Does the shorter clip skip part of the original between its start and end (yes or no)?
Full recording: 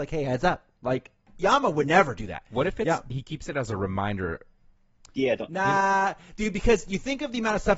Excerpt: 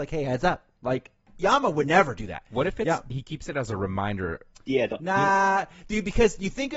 yes